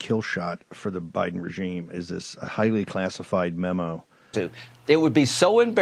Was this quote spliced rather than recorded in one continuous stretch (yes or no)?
yes